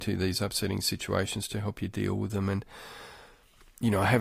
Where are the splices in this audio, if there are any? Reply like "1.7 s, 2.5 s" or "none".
none